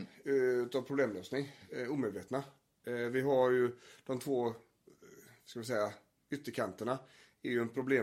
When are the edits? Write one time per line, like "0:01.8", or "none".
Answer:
none

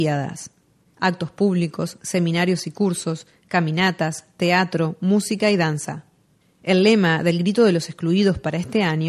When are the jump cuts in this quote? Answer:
0:00.9
0:02.0

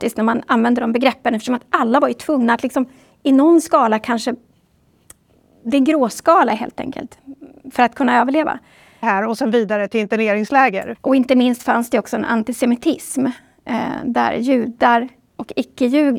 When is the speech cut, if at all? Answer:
0:09.0
0:10.9

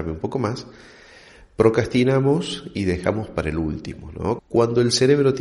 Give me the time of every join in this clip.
0:04.4

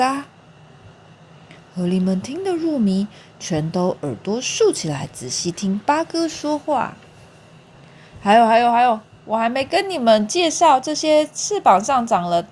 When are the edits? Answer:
none

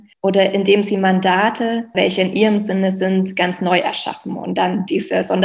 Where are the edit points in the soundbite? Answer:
none

